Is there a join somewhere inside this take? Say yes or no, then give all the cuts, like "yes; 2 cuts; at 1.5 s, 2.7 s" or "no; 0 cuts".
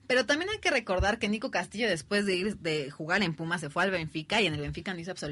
no; 0 cuts